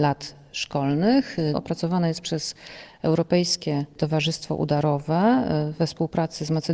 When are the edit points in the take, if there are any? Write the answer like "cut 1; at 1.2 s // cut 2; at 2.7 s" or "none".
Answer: cut 1; at 1.5 s